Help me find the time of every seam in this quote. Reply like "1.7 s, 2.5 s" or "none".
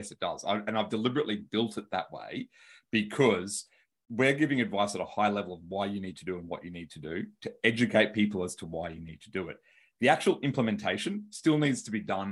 none

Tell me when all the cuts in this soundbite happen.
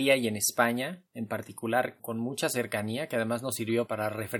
none

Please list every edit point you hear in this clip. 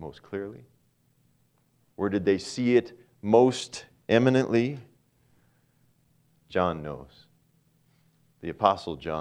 none

